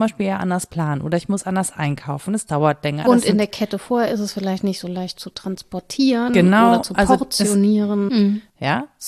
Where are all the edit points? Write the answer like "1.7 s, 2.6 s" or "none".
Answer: 3.0 s, 8.1 s